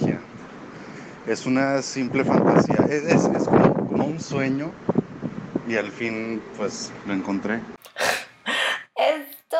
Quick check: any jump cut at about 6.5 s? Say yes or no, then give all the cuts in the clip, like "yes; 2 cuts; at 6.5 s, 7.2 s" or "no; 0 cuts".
no; 0 cuts